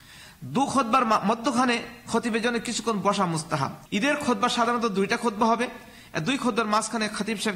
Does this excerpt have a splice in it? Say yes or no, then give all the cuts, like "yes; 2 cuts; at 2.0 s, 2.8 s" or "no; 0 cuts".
yes; 1 cut; at 3.9 s